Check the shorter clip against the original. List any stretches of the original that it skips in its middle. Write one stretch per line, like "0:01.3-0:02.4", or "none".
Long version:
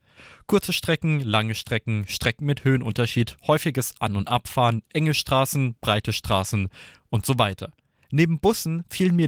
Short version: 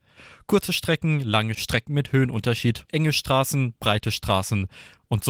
0:01.5-0:02.1
0:03.4-0:04.9

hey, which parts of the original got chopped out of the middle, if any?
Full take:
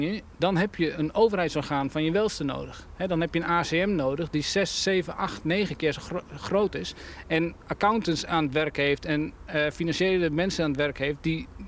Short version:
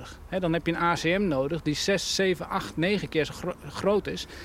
none

